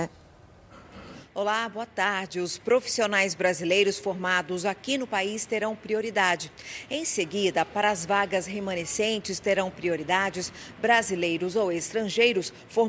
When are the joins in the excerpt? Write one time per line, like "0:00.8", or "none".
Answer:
none